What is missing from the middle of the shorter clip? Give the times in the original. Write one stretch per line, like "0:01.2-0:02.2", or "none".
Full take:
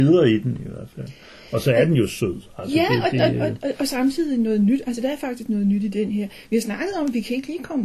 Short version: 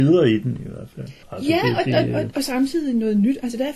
0:01.2-0:02.5
0:03.6-0:03.8